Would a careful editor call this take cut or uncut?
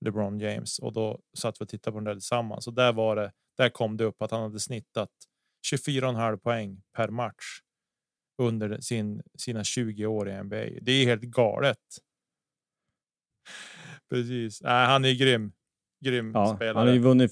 cut